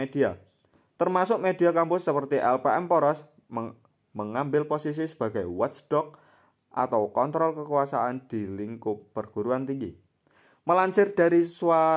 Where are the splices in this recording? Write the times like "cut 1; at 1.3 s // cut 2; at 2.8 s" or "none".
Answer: none